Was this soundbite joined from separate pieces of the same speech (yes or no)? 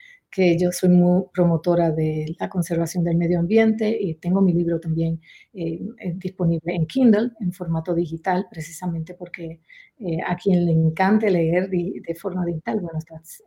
no